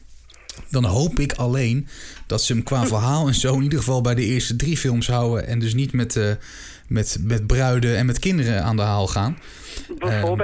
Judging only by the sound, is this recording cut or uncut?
uncut